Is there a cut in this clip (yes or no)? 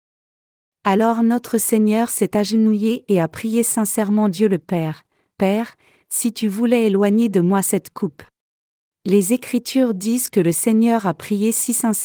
yes